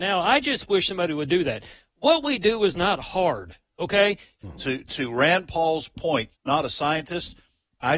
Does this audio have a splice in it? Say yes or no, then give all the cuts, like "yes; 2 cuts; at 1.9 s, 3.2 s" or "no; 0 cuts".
yes; 2 cuts; at 4.4 s, 6.3 s